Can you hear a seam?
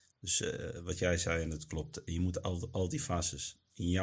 no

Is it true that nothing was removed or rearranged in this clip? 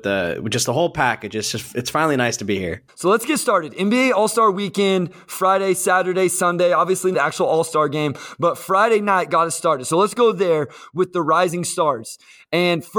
no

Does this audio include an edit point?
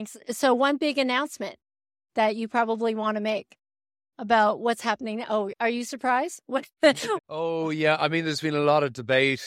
yes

